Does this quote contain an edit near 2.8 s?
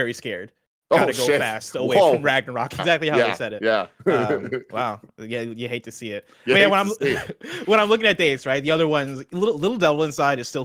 yes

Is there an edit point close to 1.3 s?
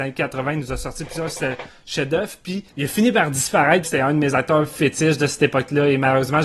no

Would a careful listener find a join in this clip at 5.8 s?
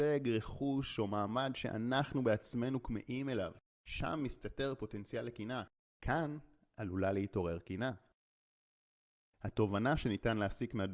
yes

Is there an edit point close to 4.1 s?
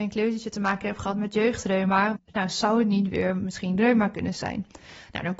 no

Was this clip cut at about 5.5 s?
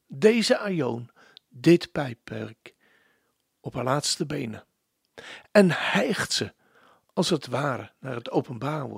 no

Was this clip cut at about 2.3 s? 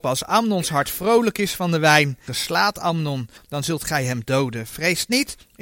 yes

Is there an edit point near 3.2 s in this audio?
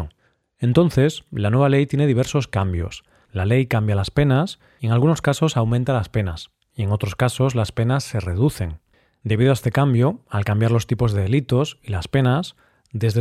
no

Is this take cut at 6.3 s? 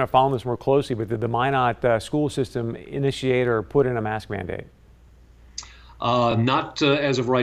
no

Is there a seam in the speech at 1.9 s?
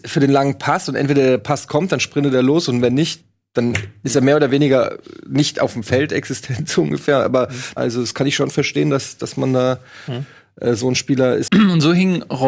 no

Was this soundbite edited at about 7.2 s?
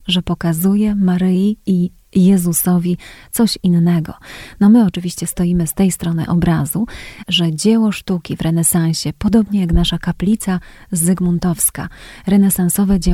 yes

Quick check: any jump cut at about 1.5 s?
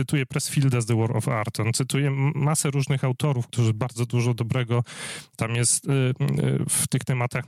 no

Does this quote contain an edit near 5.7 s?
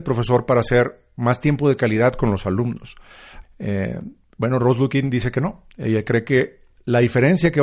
no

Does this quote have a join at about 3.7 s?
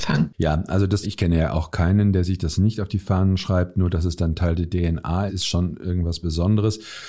no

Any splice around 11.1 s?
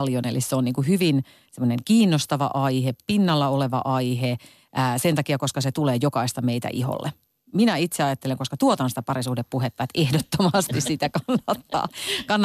no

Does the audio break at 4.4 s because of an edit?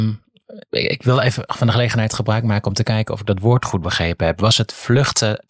no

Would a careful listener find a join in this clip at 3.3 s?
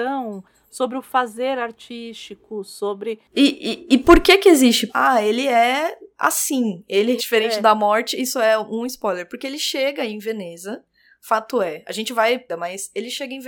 no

